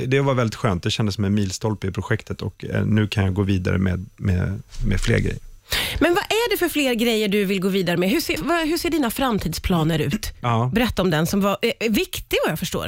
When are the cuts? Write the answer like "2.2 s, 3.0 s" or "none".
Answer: 8.4 s, 10.4 s